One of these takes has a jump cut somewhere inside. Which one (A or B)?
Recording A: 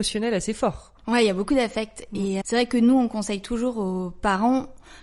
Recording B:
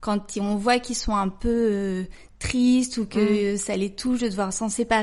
A